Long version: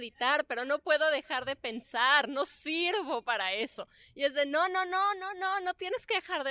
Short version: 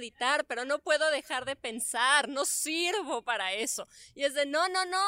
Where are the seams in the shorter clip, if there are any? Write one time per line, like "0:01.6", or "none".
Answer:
none